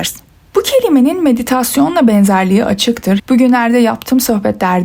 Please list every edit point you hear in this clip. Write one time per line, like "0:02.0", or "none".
0:03.2